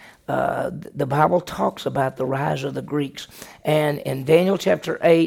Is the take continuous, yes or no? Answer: yes